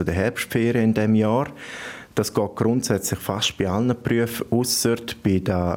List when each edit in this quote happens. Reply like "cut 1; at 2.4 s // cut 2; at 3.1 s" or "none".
none